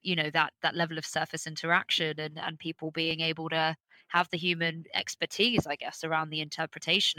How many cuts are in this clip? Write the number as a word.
zero